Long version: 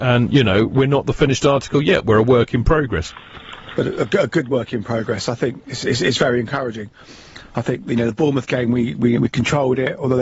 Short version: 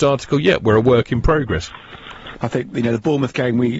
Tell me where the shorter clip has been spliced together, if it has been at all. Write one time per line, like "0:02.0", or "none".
0:02.3